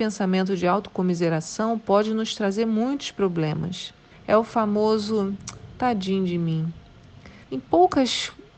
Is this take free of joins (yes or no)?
no